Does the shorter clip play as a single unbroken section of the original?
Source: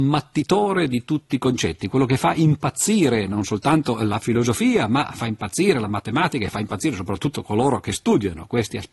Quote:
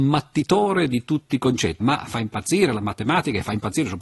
no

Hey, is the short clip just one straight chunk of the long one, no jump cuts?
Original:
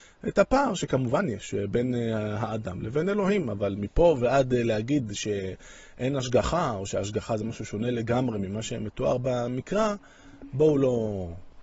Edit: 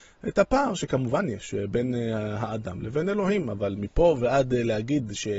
yes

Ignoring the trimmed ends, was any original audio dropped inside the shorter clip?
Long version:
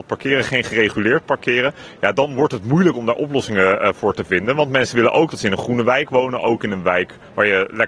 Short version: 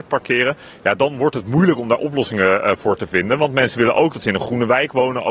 no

